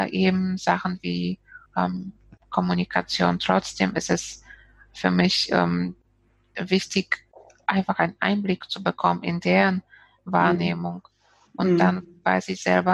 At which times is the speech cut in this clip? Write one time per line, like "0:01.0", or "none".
0:01.7